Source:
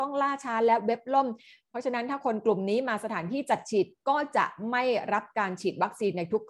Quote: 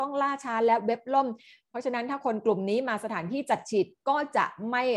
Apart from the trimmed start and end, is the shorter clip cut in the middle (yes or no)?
no